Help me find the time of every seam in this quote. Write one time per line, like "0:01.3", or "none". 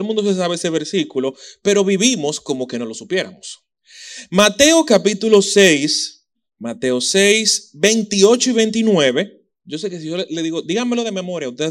none